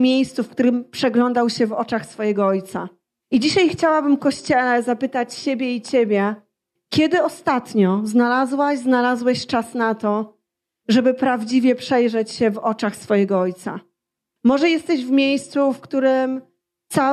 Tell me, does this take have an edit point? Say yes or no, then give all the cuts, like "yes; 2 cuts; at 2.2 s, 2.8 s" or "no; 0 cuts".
no; 0 cuts